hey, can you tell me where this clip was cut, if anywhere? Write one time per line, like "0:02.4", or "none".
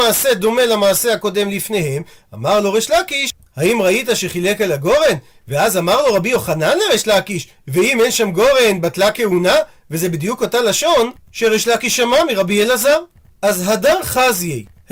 none

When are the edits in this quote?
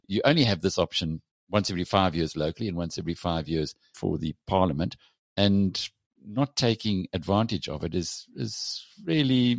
none

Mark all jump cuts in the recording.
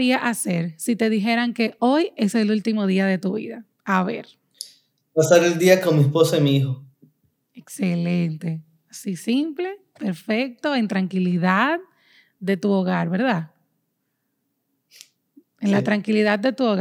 0:03.7

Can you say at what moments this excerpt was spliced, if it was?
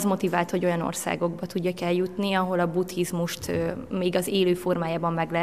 none

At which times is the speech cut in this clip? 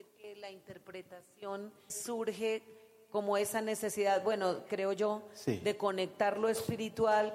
0:01.9

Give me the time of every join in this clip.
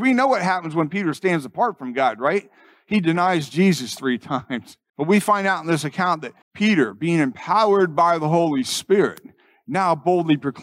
0:04.9
0:06.4

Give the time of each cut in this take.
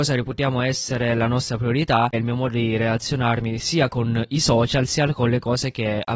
0:02.1

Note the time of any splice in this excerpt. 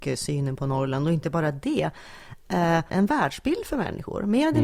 0:02.9

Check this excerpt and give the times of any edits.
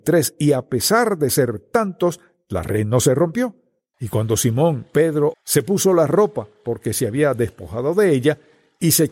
0:03.9
0:05.3

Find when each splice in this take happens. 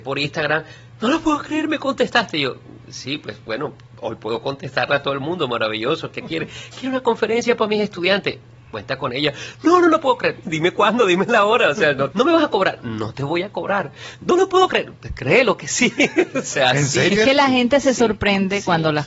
0:10.4
0:12.1

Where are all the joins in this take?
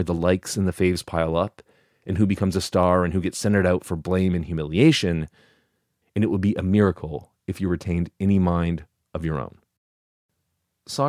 0:06.0

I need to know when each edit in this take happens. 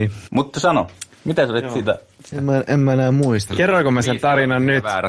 0:02.3
0:03.5

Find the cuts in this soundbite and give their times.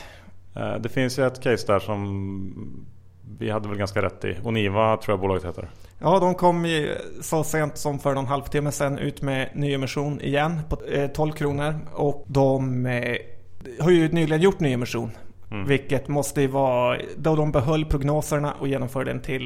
none

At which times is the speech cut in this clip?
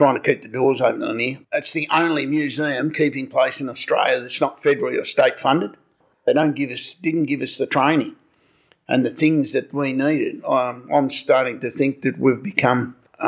0:06.1

